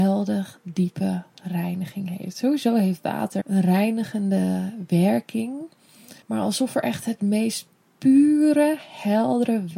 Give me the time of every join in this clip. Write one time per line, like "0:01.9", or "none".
0:03.4
0:06.2